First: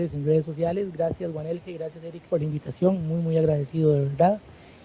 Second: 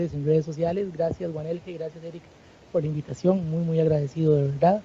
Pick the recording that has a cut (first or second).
first